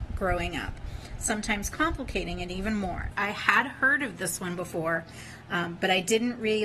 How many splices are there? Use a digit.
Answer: 1